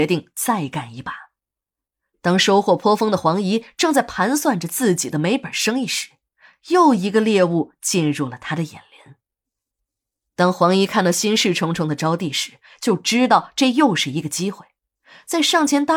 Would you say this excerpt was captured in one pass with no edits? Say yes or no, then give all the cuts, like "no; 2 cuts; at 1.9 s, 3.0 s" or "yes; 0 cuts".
yes; 0 cuts